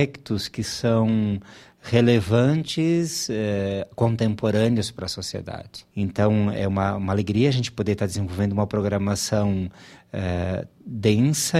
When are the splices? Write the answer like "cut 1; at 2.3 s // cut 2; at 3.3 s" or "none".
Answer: none